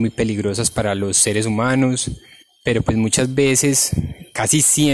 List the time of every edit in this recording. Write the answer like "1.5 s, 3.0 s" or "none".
none